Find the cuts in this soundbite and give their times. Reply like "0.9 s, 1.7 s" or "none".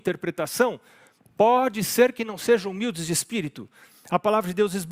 none